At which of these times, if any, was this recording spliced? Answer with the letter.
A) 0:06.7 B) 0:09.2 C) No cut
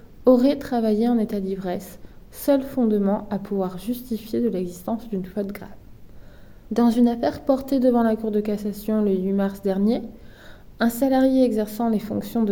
A